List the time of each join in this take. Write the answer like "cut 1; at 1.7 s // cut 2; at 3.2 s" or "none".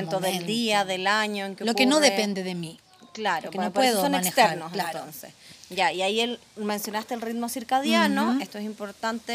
none